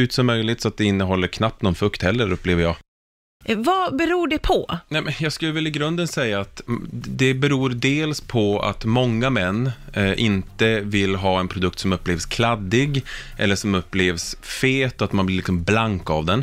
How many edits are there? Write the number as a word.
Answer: one